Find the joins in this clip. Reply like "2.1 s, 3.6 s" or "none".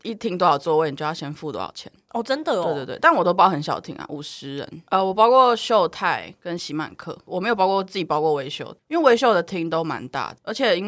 none